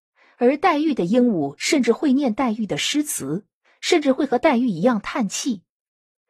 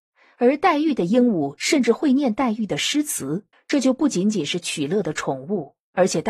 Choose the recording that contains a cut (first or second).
second